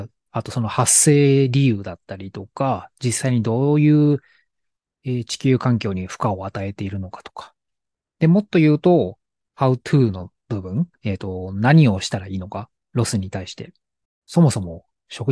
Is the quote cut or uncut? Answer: cut